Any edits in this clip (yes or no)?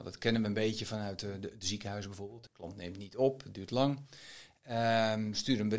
yes